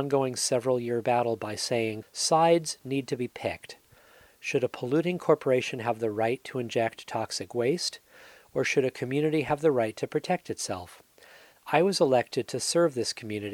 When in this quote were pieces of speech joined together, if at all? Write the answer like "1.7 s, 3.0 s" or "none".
2.0 s